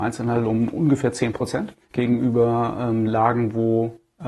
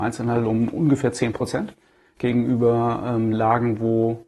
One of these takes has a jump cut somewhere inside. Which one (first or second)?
first